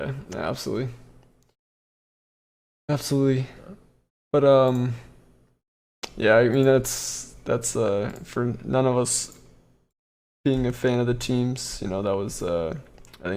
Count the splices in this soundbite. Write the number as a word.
zero